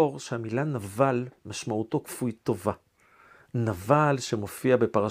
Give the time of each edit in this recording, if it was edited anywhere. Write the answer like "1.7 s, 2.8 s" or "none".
1.4 s

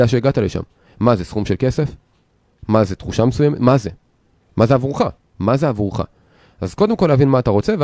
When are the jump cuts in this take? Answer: 5.2 s

